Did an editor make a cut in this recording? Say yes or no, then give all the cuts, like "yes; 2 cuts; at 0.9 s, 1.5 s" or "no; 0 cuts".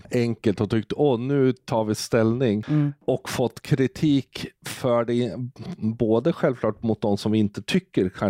no; 0 cuts